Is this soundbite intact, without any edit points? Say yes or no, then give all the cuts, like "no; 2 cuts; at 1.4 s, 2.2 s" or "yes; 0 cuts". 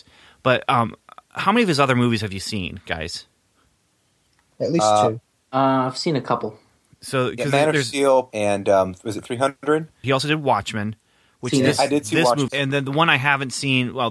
no; 3 cuts; at 8.3 s, 10.0 s, 12.5 s